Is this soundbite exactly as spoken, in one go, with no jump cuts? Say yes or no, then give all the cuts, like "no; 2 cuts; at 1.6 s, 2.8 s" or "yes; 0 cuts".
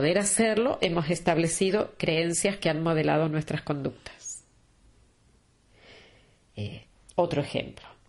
yes; 0 cuts